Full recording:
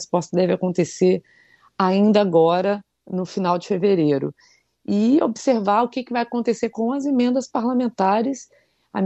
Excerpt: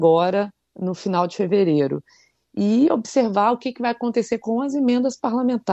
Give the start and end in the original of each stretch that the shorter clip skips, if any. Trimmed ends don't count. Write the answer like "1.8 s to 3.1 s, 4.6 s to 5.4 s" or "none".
none